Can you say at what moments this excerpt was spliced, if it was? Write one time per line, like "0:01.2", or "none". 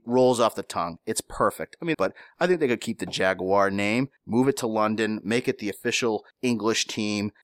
0:01.9